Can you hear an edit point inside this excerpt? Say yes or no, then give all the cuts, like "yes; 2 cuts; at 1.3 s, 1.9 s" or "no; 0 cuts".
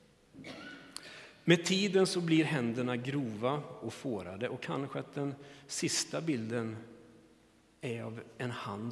no; 0 cuts